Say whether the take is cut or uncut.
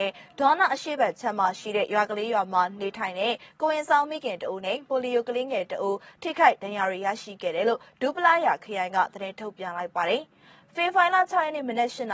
uncut